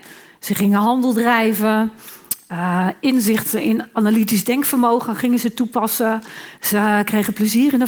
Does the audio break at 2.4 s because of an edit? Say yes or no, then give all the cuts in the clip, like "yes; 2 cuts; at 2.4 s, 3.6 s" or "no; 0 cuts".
no; 1 cut; at 6.6 s